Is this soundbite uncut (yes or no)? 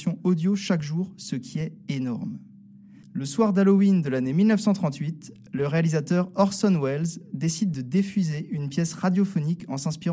no